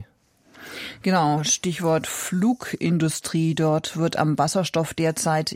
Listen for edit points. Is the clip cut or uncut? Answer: uncut